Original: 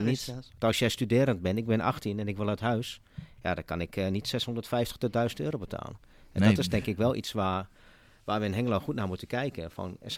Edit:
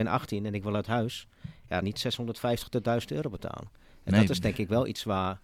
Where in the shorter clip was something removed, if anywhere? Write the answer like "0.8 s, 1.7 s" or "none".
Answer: 1.8 s